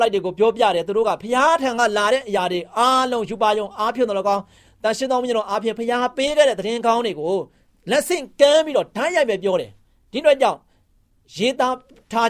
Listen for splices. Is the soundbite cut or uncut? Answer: uncut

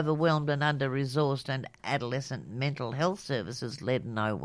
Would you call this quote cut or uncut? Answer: cut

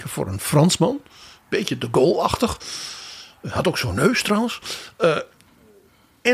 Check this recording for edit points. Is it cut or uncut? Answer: uncut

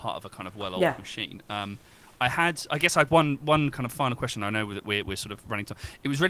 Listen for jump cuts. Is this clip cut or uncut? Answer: uncut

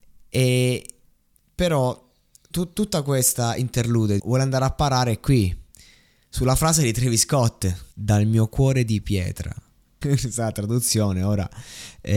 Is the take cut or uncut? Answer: cut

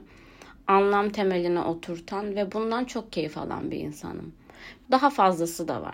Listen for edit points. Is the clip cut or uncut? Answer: cut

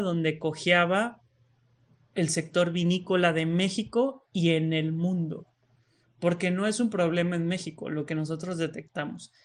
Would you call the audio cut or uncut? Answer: uncut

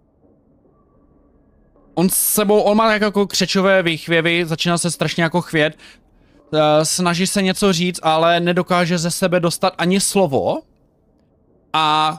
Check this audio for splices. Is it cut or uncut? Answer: uncut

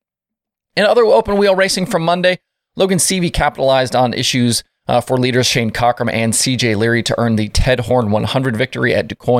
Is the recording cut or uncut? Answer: uncut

